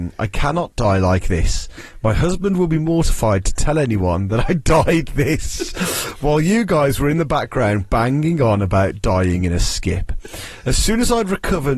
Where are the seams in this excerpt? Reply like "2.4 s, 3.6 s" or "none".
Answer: 5.1 s